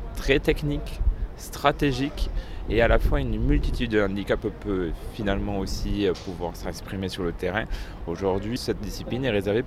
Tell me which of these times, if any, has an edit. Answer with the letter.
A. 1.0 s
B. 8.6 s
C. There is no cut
B